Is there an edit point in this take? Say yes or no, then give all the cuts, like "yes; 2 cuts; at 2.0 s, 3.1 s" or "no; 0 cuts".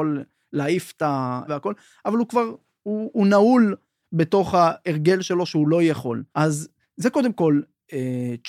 yes; 2 cuts; at 1.5 s, 6.3 s